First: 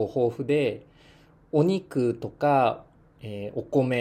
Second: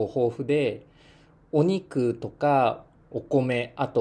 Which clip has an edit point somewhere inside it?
second; 1 cut; at 3.1 s

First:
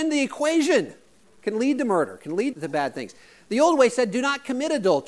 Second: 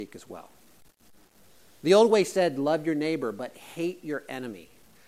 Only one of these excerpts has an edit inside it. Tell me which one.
first; 2 cuts; at 1.2 s, 2.5 s

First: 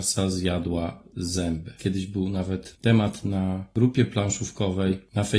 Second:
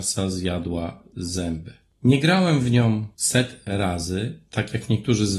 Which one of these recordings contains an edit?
first; 1 cut; at 1.8 s

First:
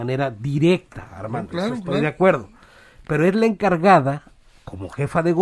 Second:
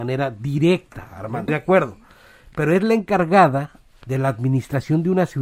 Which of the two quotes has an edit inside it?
second; 2 cuts; at 1.5 s, 4.0 s

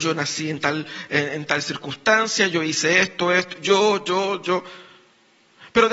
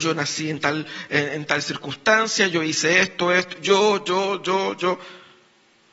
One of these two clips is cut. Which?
first; 1 cut; at 4.4 s

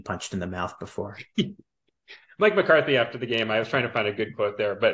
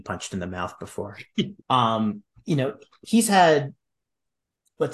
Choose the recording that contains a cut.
second; 1 cut; at 1.6 s

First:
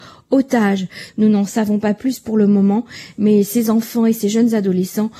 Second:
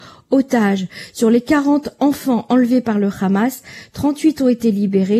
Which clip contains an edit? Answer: first; 1 cut; at 1.1 s

